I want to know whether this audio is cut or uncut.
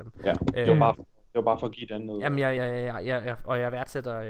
uncut